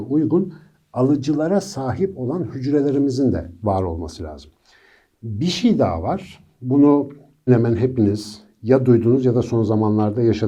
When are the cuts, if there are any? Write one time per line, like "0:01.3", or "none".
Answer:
0:07.5